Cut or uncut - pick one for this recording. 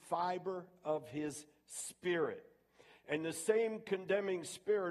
uncut